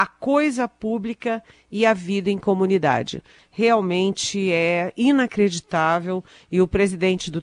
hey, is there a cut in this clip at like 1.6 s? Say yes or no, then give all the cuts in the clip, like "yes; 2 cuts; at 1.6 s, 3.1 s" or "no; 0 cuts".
no; 1 cut; at 3.4 s